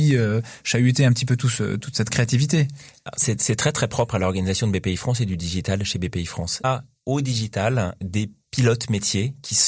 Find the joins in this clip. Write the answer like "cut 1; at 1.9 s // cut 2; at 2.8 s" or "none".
cut 1; at 6.6 s // cut 2; at 8.0 s